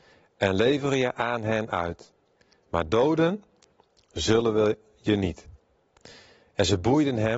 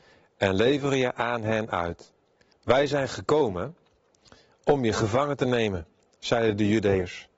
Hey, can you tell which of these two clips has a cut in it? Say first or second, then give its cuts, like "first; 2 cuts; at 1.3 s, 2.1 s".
second; 1 cut; at 2.5 s